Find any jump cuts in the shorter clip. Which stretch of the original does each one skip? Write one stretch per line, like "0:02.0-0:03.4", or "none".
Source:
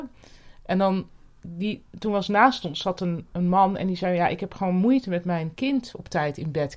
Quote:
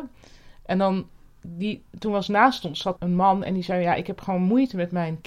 0:03.0-0:03.3